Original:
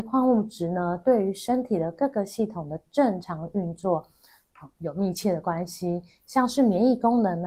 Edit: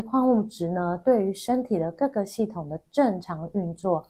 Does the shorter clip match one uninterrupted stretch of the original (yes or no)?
yes